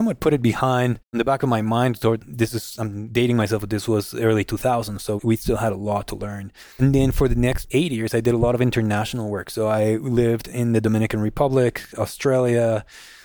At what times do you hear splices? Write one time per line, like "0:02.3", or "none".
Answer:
0:06.7